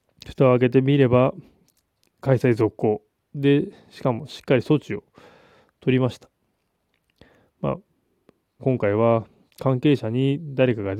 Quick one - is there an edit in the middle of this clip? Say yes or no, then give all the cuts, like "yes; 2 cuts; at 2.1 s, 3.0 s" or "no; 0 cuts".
yes; 1 cut; at 8.6 s